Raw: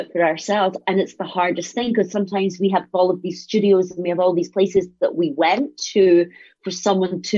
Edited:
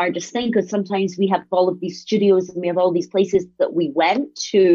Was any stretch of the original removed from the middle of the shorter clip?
no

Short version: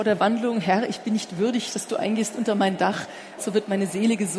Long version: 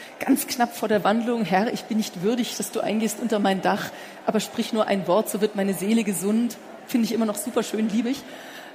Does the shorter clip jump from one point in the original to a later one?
yes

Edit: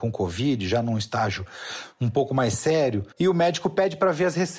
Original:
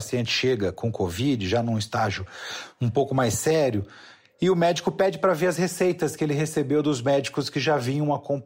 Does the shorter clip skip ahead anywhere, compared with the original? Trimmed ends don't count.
yes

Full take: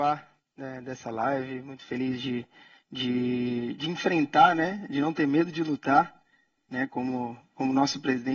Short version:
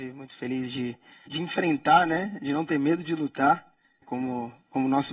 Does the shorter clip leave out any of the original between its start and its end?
yes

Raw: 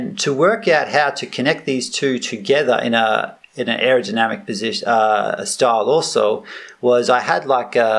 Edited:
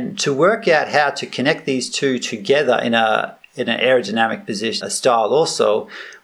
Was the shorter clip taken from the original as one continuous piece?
no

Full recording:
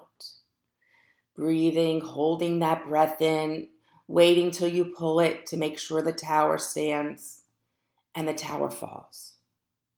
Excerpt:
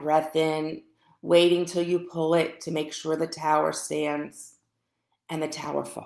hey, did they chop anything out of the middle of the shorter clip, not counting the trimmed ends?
no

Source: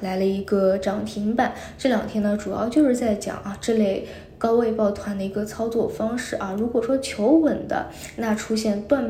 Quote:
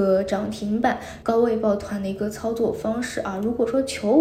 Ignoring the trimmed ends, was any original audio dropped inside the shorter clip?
yes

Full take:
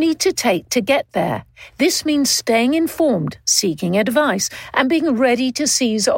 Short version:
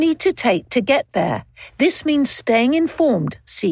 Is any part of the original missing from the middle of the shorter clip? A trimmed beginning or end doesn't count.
no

